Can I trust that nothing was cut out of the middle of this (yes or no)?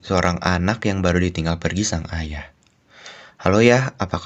yes